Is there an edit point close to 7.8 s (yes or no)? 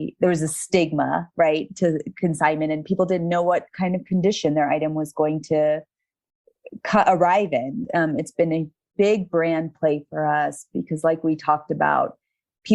yes